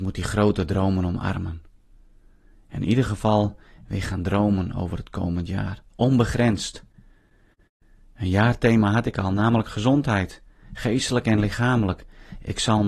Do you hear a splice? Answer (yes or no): no